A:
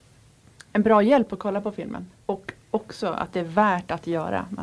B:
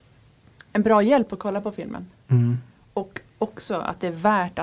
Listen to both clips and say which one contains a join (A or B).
A